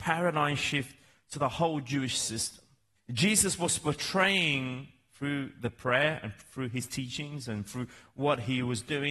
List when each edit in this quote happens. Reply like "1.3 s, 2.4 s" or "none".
3.0 s